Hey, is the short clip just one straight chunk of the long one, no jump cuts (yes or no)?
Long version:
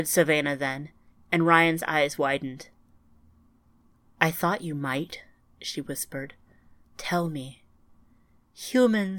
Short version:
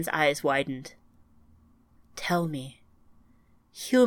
no